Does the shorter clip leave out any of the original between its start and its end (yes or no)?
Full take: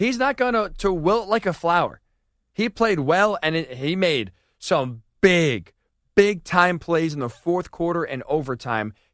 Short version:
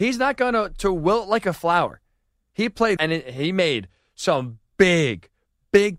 yes